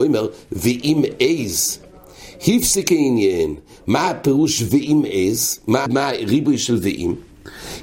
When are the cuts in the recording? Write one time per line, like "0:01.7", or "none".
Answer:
0:05.9

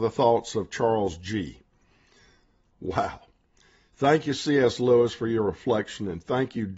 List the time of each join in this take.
0:02.7

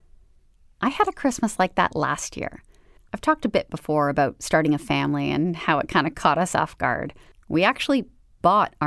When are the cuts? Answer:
0:03.0
0:07.3

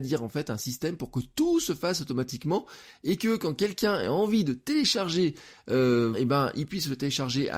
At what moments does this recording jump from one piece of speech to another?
0:06.1

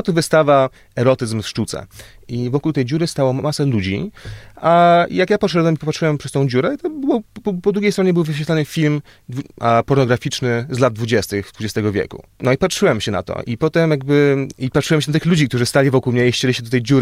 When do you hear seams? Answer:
0:02.2

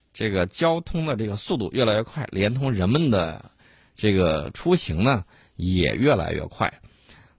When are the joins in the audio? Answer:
none

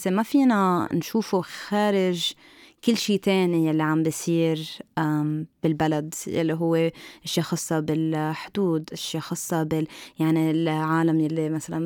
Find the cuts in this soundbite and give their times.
none

